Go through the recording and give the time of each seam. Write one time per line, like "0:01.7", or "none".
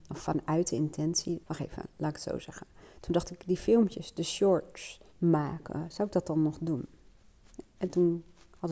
0:01.4
0:05.1